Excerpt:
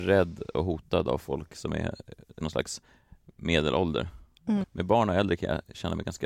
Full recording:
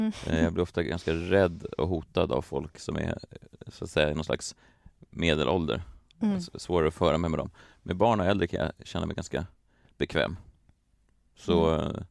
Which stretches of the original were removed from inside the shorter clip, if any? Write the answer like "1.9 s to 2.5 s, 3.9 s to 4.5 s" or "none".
3.6 s to 4.1 s, 6.4 s to 7.7 s